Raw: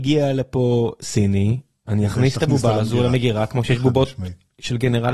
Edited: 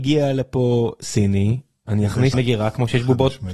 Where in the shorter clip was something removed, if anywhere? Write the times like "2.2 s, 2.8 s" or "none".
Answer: 2.3 s